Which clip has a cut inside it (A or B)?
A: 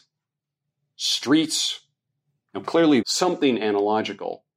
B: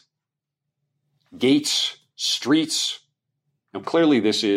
A